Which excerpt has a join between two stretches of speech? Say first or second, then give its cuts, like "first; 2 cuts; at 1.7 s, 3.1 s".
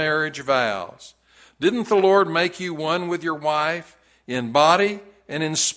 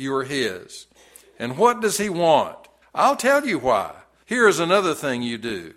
second; 2 cuts; at 2.8 s, 4.2 s